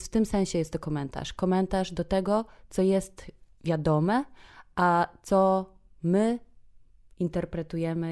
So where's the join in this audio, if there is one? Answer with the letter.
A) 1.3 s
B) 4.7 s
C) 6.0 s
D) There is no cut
D